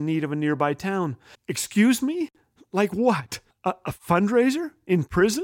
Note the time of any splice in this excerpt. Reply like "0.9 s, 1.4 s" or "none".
1.3 s, 3.5 s